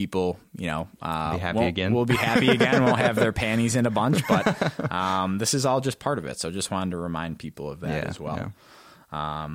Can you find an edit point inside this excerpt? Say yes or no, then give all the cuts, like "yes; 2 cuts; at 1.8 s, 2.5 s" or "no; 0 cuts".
no; 0 cuts